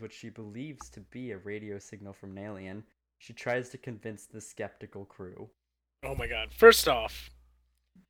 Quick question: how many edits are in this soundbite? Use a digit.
0